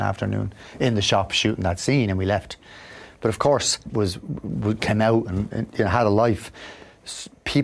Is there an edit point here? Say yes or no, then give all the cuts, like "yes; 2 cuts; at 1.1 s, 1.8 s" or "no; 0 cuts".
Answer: yes; 1 cut; at 3.9 s